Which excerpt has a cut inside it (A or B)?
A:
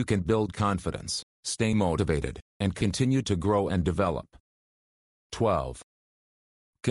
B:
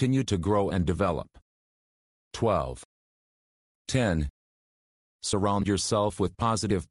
B